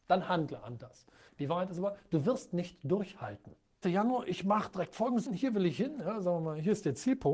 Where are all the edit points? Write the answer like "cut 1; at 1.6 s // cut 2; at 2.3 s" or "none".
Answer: cut 1; at 1.3 s // cut 2; at 3.8 s // cut 3; at 5.3 s